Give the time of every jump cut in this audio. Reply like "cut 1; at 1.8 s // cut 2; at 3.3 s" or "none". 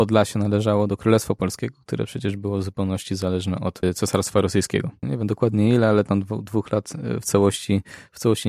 cut 1; at 5.0 s